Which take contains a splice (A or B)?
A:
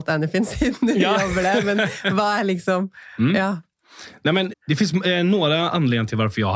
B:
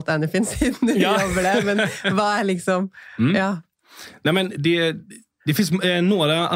A